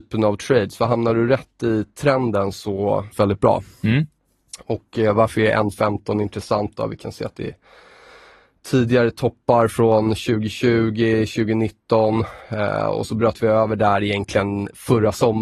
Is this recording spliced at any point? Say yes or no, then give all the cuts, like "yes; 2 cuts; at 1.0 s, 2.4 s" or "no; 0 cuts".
yes; 1 cut; at 3.1 s